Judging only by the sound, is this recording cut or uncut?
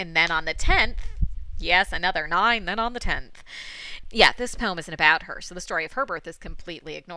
cut